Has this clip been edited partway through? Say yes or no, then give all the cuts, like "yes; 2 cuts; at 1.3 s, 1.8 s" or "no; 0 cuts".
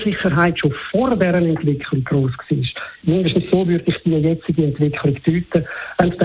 no; 0 cuts